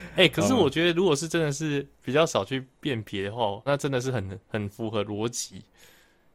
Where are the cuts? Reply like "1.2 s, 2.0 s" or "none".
3.7 s